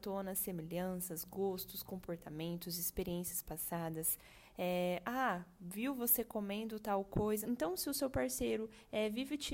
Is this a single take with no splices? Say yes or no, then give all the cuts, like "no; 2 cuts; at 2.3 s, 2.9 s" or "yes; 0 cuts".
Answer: no; 1 cut; at 7.4 s